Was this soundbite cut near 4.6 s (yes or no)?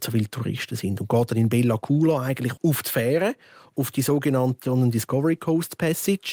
yes